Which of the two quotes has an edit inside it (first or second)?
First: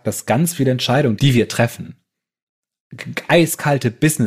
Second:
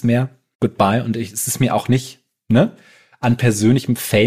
first